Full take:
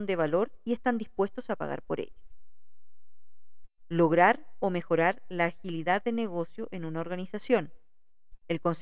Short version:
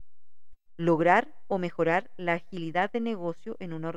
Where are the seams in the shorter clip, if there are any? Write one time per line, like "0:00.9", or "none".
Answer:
none